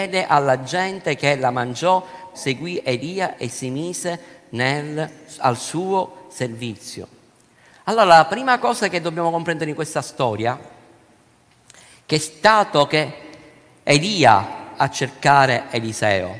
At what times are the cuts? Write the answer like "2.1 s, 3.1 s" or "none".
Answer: 2.3 s